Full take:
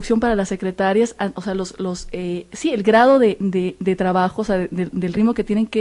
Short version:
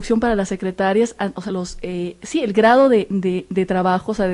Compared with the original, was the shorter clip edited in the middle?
yes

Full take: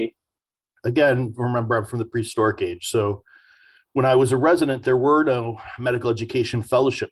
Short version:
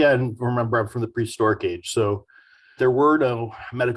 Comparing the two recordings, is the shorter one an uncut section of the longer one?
no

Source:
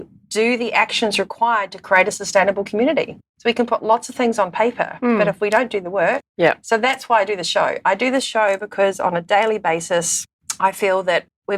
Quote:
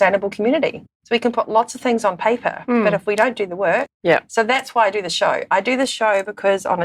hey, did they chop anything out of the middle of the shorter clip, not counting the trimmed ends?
no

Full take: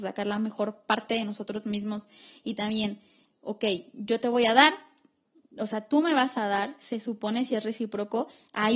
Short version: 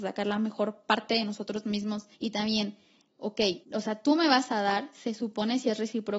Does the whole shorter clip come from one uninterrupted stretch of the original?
no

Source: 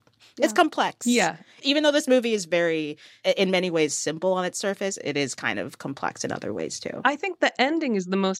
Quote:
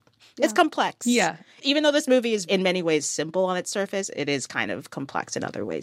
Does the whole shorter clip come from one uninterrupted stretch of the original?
no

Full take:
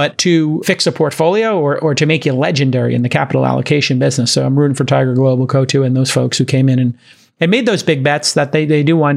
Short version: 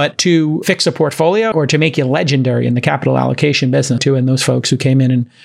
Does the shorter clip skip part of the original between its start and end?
yes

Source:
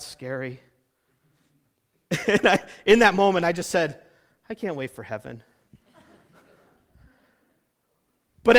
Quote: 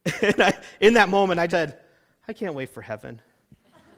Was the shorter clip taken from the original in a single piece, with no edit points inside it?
no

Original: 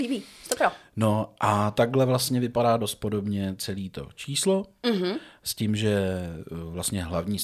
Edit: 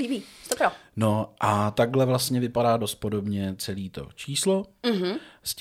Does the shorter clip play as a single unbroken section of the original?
yes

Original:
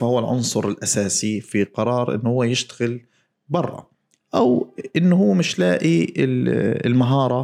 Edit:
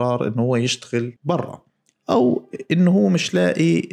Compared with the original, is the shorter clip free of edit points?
no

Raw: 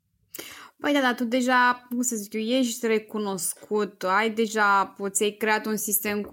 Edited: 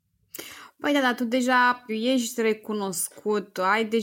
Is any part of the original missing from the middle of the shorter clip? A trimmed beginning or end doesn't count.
yes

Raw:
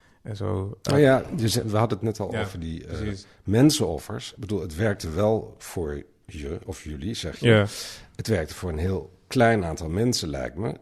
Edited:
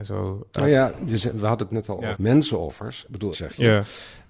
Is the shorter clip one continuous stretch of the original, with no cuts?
no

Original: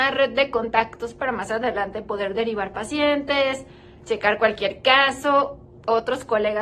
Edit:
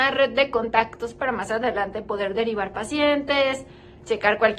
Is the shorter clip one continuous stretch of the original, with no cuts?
yes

